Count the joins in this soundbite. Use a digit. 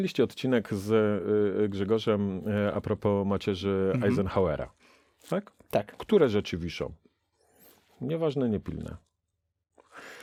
0